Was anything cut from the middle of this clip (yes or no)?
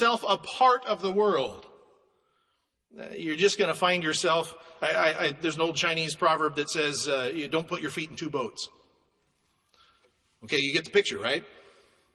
no